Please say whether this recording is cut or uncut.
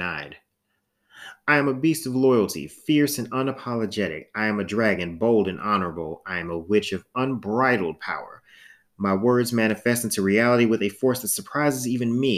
uncut